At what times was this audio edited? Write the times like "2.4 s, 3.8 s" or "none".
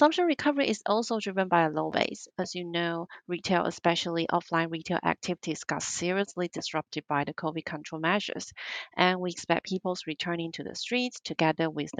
none